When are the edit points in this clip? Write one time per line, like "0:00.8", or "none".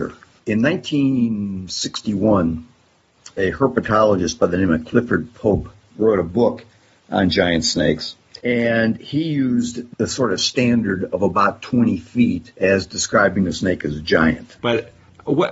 0:08.4
0:12.5
0:14.6